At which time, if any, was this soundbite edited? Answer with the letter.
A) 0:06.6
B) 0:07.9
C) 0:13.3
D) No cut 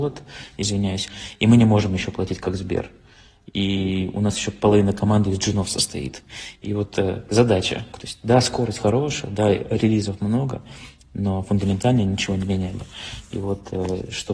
B